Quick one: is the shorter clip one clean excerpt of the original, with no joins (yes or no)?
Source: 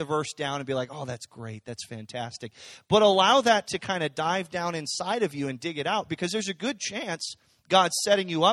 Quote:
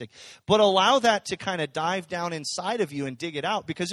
yes